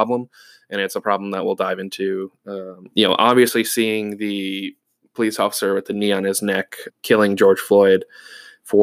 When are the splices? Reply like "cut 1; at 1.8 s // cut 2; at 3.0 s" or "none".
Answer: cut 1; at 2.9 s // cut 2; at 6.9 s